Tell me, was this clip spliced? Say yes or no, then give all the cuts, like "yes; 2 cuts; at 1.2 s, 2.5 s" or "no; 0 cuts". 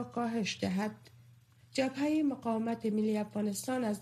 no; 0 cuts